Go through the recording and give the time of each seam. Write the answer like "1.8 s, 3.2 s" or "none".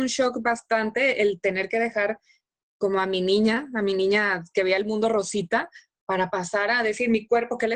none